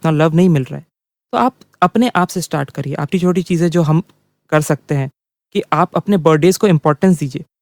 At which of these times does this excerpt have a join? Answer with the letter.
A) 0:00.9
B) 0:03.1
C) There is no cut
B